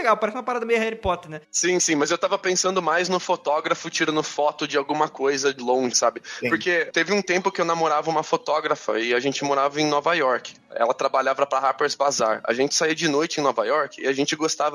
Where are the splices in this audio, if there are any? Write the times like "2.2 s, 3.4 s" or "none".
5.9 s